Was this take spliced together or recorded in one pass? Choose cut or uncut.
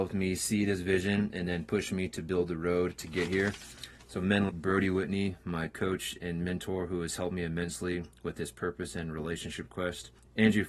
cut